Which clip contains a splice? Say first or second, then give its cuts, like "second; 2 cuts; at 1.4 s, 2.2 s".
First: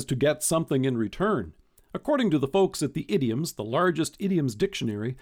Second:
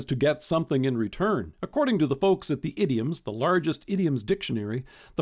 second; 1 cut; at 1.6 s